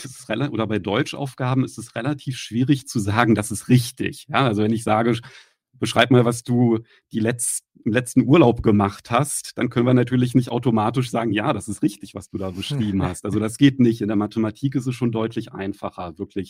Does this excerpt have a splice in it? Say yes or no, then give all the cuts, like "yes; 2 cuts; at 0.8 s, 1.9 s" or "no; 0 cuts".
no; 0 cuts